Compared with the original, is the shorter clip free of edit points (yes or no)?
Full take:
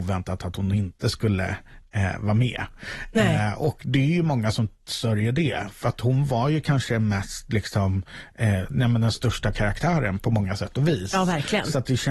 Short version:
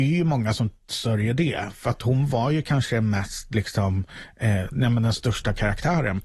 yes